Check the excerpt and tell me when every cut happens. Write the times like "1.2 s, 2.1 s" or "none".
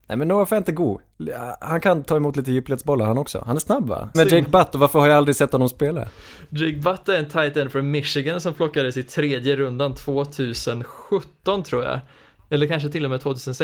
4.1 s

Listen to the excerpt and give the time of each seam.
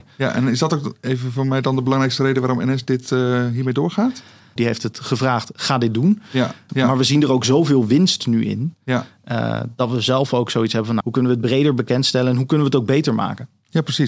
4.6 s, 6.7 s, 11.0 s

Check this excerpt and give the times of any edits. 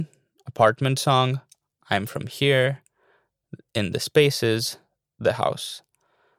1.8 s

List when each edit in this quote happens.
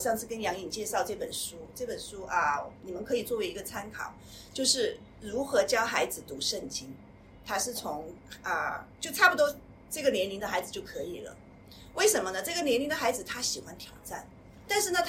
none

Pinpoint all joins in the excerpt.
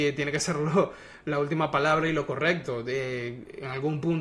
none

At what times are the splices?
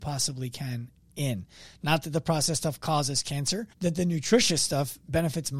3.7 s

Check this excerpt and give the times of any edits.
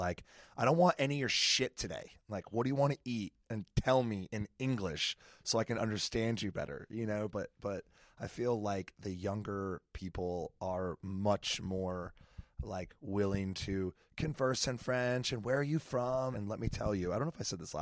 16.3 s

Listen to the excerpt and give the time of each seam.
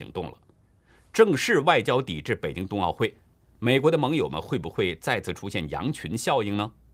none

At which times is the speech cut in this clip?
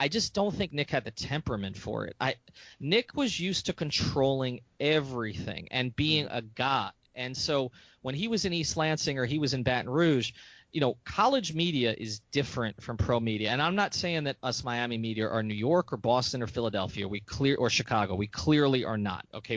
none

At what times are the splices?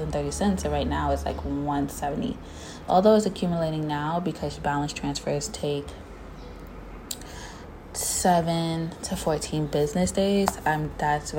2.9 s

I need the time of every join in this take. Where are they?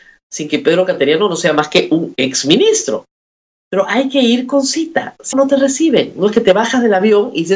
5.3 s

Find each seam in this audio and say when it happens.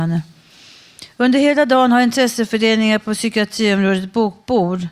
none

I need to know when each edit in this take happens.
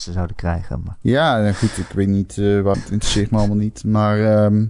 2.7 s

